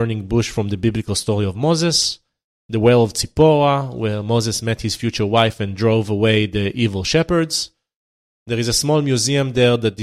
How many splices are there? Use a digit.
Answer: 0